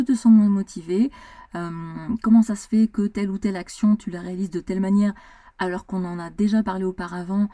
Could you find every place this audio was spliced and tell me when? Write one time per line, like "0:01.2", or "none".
none